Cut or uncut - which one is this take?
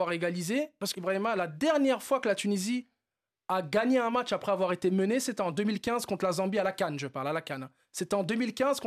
cut